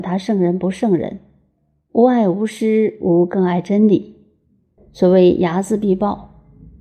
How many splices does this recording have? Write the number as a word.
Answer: one